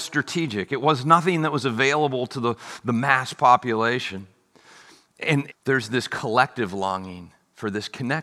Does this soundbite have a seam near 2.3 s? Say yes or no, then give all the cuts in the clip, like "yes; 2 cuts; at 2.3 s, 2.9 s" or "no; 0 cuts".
no; 1 cut; at 5.5 s